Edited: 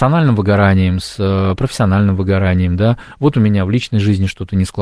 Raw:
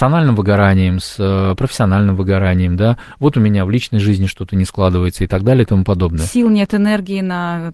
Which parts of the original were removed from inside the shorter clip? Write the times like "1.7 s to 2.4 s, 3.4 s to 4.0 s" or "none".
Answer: none